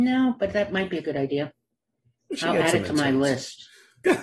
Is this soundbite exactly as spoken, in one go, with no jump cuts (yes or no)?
yes